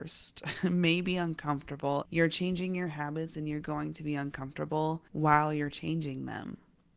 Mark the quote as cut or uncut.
cut